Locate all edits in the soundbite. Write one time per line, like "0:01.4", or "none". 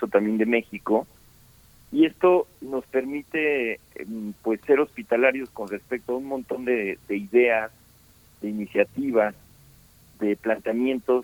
none